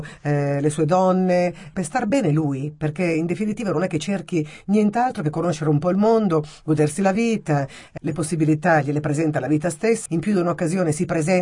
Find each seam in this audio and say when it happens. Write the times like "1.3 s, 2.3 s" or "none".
1.7 s, 8.0 s, 10.1 s